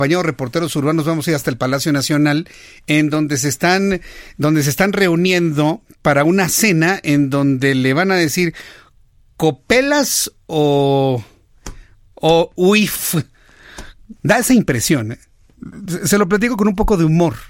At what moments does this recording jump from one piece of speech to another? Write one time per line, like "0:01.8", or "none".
0:12.1
0:14.2